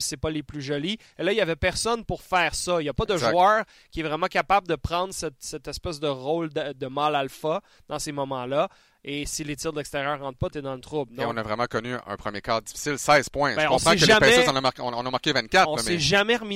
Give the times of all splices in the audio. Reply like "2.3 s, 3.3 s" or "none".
none

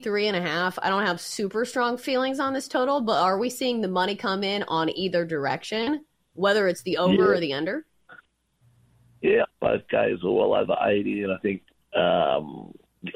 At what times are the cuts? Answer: 9.4 s

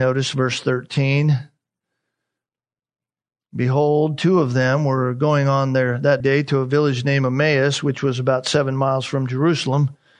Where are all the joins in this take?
6.2 s

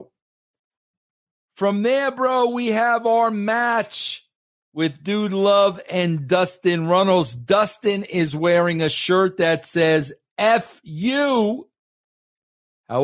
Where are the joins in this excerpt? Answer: none

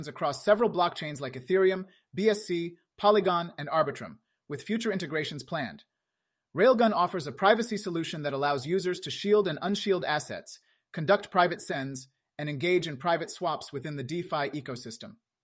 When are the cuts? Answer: none

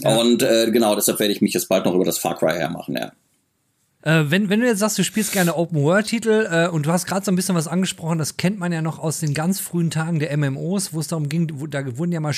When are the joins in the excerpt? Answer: 4.0 s

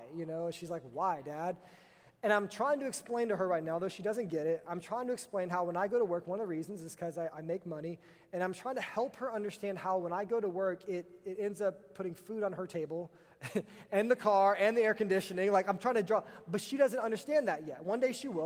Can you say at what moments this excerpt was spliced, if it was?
none

